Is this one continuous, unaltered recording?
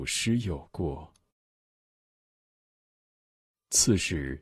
yes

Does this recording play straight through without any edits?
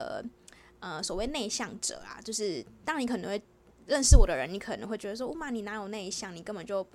yes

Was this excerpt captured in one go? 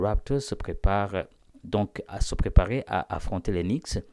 no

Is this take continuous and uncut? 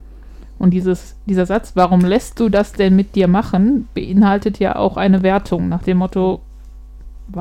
yes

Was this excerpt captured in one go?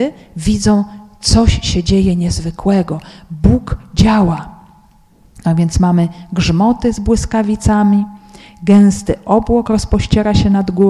yes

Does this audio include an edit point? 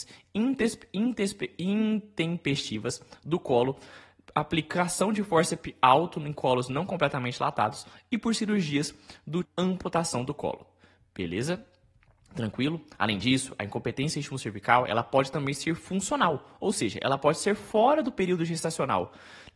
yes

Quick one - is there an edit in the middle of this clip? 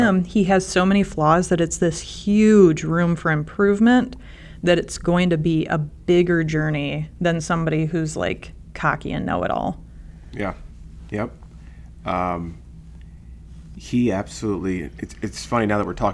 no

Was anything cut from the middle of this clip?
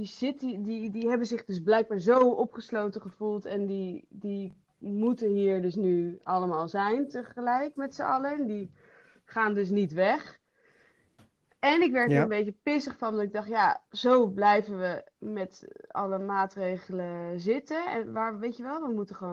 no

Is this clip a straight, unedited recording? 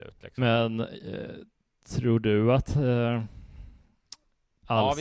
yes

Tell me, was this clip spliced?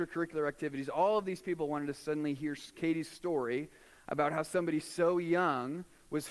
no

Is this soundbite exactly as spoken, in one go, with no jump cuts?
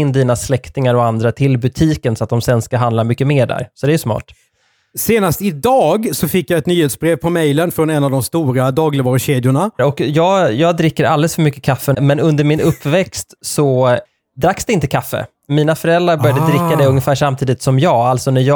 no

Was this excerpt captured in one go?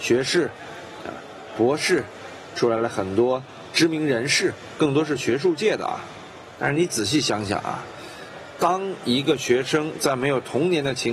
yes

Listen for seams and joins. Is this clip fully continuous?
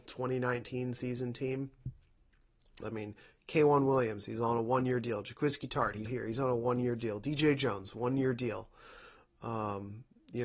no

